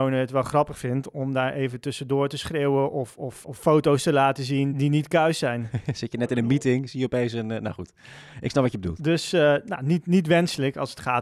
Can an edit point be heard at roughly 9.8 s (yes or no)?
no